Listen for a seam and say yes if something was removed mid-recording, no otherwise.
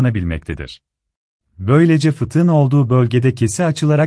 yes